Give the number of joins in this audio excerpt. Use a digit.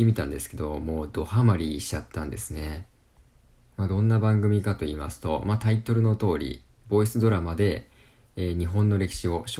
0